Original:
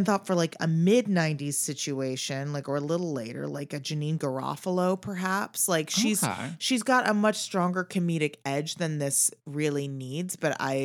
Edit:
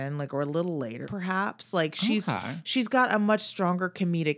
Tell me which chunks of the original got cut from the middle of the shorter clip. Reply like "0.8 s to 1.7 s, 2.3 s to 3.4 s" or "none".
3.4 s to 5.0 s